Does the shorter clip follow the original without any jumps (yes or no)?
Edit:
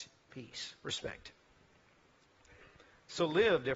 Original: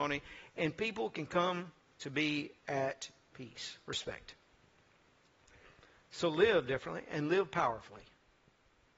yes